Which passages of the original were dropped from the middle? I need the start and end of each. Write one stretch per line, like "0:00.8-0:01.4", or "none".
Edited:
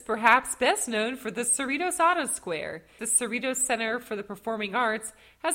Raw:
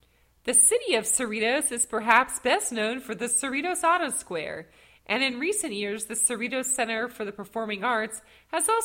0:04.8-0:06.1

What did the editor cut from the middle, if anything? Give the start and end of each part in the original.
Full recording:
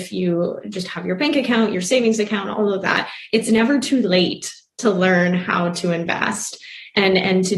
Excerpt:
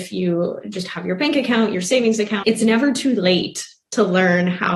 0:02.4-0:03.3

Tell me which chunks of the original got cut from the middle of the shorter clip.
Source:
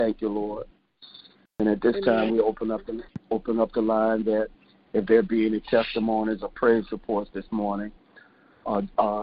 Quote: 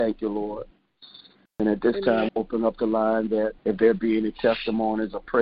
0:02.3-0:03.2
0:04.5-0:04.9

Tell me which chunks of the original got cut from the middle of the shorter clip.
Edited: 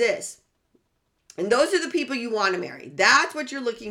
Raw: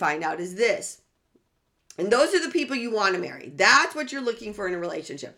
none

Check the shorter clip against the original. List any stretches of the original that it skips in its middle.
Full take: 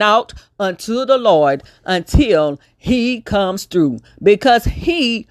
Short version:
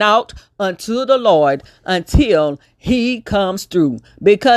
none

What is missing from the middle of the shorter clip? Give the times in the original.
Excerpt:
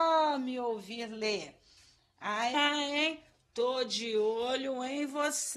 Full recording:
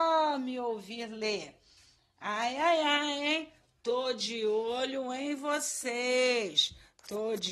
0:02.5-0:02.8

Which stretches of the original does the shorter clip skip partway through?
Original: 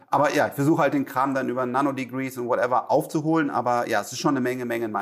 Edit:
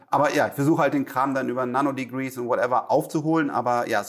none

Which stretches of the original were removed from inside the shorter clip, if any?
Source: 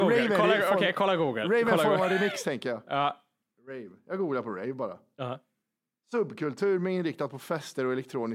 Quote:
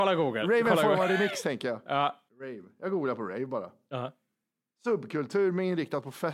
0:03.3-0:03.6

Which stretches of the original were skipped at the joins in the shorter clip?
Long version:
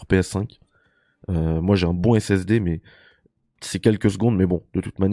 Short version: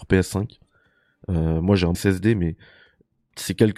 0:01.9-0:02.2

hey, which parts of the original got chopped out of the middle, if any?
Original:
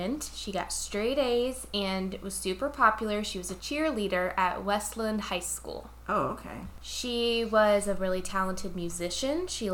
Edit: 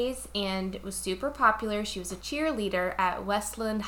none

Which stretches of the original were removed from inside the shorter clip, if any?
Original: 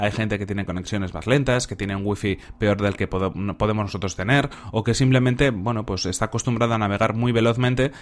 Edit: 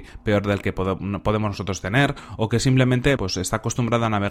0:05.5-0:05.9

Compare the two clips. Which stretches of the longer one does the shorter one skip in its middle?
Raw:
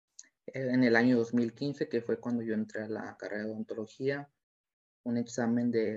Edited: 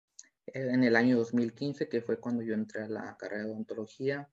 none

